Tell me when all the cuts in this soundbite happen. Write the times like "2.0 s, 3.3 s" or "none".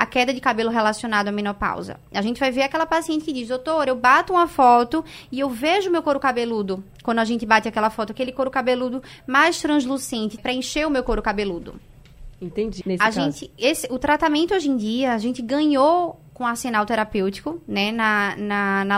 10.4 s, 12.8 s